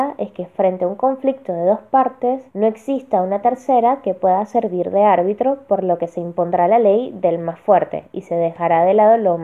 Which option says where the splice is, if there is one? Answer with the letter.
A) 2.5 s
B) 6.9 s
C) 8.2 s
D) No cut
A